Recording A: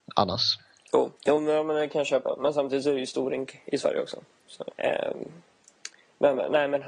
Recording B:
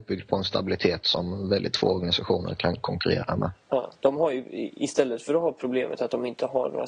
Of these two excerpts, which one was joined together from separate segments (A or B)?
A